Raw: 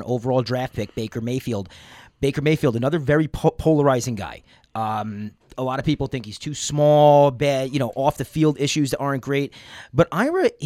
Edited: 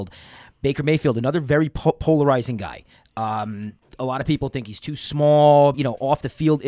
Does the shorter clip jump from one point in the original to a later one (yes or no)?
yes